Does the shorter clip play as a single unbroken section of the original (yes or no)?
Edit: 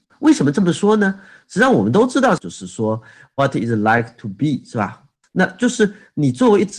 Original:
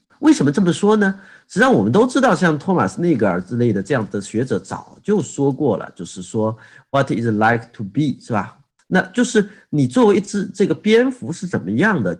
no